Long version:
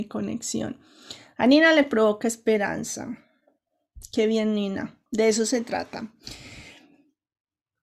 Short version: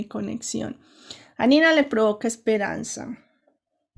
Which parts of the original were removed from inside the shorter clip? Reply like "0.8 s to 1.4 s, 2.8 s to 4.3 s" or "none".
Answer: none